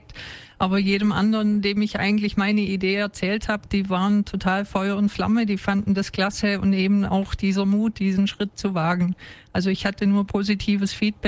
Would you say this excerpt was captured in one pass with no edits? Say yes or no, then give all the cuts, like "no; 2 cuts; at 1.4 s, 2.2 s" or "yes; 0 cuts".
yes; 0 cuts